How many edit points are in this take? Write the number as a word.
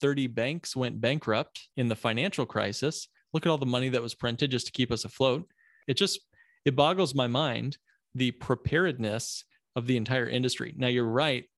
two